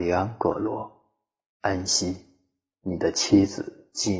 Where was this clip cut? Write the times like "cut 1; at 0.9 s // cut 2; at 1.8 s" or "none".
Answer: none